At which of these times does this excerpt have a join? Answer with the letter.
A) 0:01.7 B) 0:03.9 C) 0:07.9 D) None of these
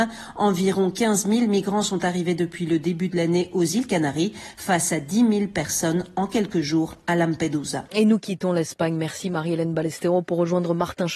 D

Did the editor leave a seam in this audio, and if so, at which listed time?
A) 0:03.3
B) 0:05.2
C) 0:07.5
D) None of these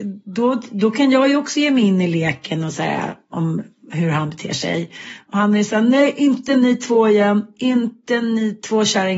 A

